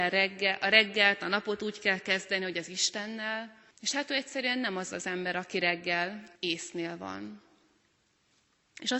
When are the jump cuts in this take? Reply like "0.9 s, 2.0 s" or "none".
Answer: 3.7 s, 6.4 s